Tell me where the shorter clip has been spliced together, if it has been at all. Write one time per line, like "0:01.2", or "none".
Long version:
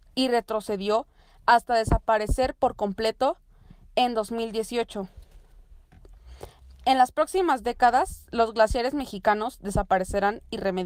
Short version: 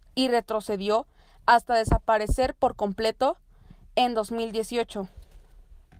none